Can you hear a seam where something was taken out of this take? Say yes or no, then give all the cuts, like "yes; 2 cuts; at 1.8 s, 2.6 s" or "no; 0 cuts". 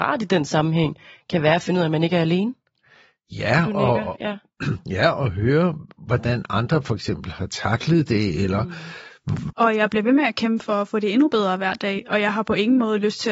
yes; 1 cut; at 9.5 s